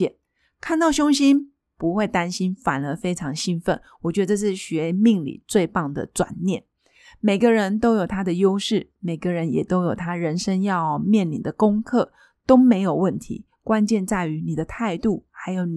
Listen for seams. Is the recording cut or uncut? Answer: uncut